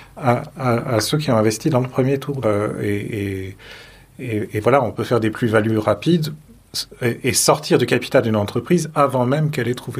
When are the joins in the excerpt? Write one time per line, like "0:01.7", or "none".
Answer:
0:02.4